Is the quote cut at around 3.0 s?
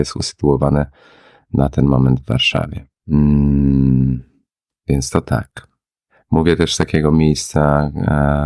yes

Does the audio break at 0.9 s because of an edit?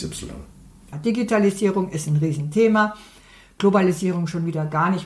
yes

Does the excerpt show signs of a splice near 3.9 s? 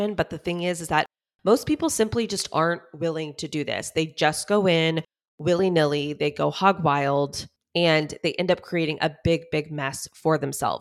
no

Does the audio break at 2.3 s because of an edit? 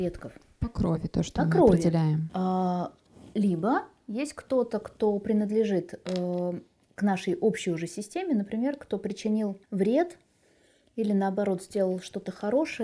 yes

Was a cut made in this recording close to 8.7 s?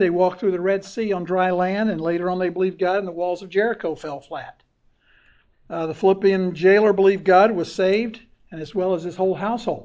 no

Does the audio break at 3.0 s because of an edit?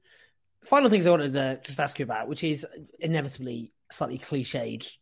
yes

